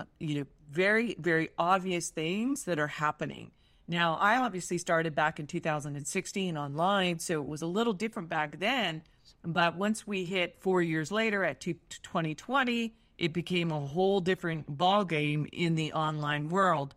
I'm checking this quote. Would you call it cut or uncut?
uncut